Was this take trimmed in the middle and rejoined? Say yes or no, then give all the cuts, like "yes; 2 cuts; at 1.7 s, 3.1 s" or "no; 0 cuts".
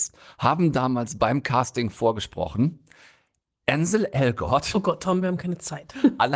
yes; 1 cut; at 5.2 s